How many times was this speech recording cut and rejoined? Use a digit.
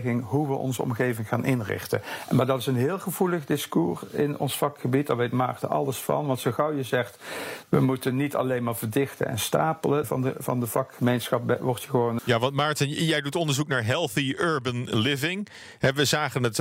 2